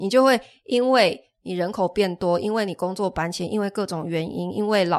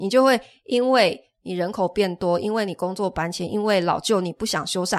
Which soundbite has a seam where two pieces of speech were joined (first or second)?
second